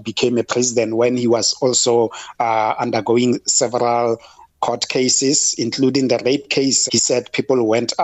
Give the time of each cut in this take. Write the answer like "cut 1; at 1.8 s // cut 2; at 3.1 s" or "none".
cut 1; at 6.9 s